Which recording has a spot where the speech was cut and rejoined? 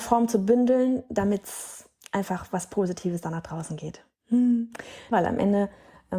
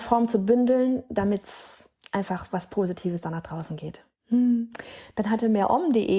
first; 1 cut; at 5.1 s

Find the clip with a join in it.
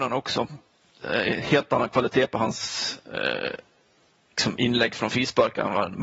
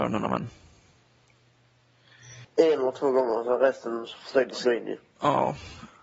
second; 1 cut; at 2.4 s

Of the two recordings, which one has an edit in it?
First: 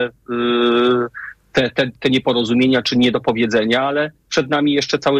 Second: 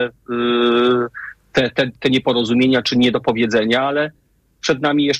first; 1 cut; at 4.2 s

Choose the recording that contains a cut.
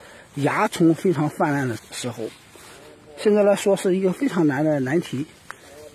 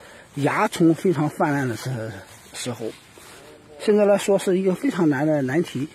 first; 1 cut; at 1.8 s

